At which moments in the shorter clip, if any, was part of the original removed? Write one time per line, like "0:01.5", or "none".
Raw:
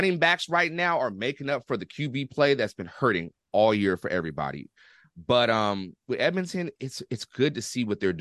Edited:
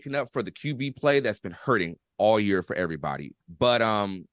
0:03.4